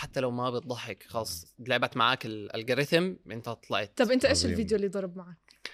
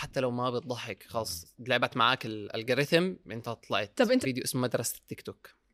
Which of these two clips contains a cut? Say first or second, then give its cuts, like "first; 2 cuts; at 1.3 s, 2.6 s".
second; 1 cut; at 4.2 s